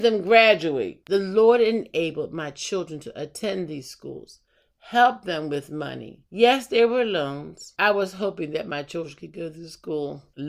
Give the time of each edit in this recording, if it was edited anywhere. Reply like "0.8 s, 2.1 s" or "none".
6.3 s